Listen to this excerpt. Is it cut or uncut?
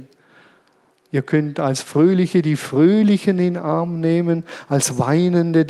uncut